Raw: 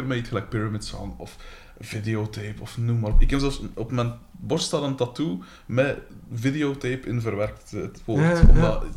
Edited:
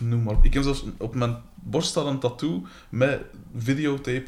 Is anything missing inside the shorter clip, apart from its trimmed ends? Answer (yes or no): no